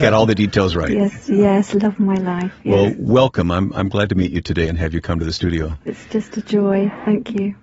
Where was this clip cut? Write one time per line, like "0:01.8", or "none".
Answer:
0:05.9